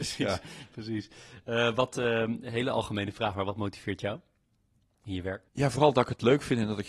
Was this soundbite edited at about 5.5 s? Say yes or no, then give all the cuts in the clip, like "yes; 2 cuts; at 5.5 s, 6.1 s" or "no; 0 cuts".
yes; 1 cut; at 5.5 s